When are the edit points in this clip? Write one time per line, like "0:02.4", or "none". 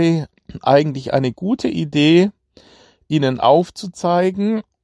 none